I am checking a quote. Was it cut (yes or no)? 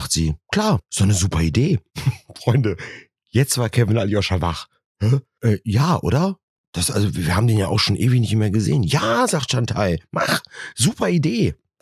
no